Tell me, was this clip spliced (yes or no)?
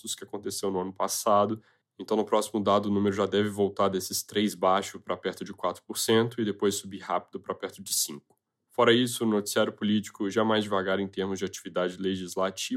no